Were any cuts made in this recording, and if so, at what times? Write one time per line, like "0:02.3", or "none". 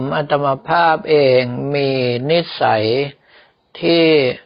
none